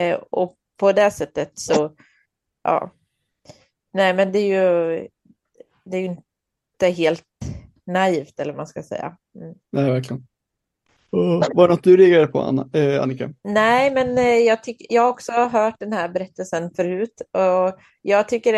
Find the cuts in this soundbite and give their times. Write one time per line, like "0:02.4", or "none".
0:09.6
0:13.4